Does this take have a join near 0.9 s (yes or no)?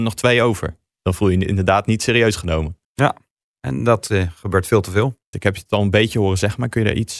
no